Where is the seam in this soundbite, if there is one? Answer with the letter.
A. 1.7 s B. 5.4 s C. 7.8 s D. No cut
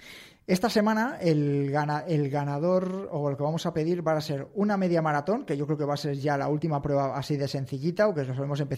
D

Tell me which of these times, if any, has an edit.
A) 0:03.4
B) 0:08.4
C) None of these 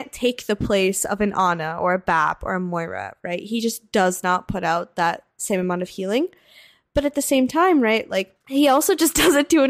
B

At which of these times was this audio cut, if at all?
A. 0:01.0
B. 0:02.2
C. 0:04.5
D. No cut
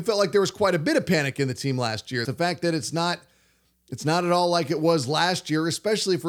B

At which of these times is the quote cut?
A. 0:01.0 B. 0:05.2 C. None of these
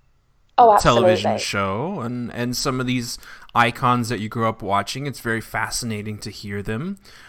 C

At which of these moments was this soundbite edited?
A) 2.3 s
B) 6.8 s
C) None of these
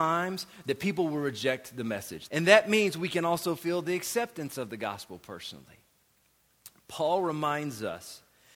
A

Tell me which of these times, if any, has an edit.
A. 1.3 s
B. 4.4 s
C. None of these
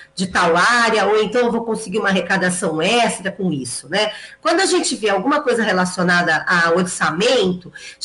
C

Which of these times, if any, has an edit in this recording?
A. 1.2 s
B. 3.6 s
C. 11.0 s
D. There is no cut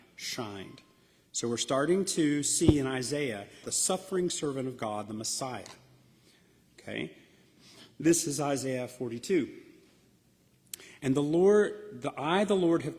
B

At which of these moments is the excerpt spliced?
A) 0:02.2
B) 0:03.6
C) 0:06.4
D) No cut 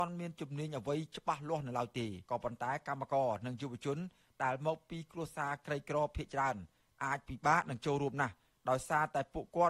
A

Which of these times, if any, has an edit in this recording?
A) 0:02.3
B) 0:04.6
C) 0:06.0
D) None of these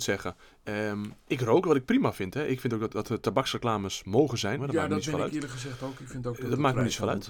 B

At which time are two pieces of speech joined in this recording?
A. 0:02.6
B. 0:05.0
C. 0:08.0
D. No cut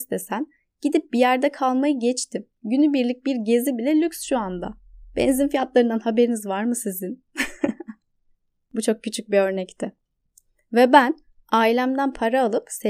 D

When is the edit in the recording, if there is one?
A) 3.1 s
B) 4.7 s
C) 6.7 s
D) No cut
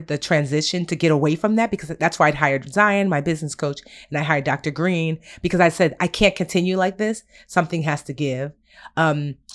D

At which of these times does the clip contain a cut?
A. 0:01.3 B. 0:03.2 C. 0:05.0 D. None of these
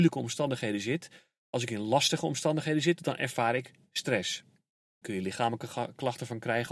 C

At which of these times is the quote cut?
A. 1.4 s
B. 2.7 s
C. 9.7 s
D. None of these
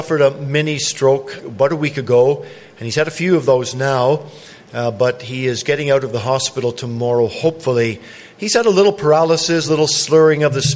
A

